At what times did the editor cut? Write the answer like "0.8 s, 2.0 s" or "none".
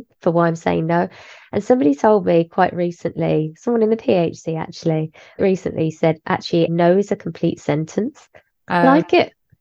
5.4 s, 6.7 s, 8.6 s